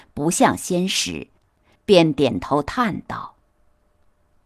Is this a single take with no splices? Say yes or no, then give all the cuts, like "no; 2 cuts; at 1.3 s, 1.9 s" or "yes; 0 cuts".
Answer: no; 1 cut; at 1.7 s